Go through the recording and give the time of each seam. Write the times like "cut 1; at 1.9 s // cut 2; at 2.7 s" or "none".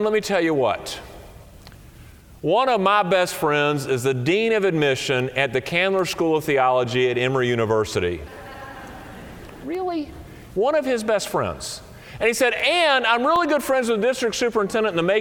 none